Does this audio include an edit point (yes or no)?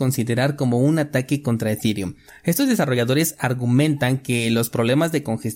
no